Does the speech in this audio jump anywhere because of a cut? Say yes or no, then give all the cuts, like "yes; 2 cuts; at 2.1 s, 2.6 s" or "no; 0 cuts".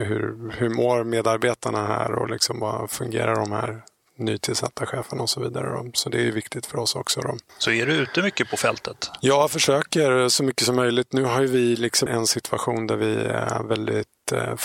yes; 2 cuts; at 7.5 s, 12.1 s